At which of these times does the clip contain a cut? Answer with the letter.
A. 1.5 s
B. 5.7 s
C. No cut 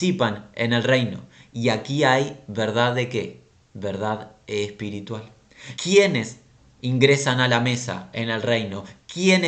B